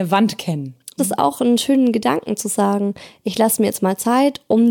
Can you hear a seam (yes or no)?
yes